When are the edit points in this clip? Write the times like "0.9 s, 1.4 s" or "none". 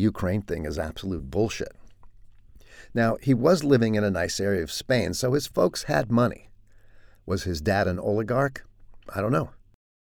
none